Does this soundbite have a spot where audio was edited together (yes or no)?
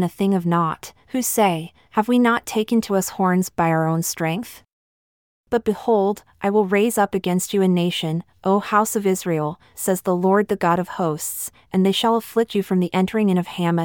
no